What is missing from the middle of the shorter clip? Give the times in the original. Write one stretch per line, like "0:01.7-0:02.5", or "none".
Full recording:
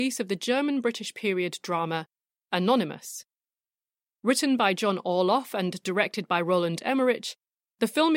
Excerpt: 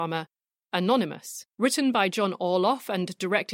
0:03.3-0:04.1